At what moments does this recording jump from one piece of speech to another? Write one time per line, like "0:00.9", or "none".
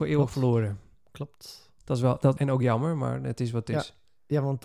0:02.4